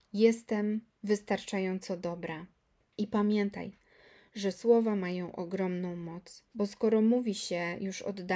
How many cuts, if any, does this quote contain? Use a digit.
2